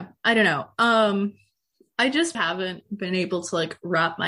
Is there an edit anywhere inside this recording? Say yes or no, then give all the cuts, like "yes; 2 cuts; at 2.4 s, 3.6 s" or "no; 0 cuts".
yes; 1 cut; at 2.3 s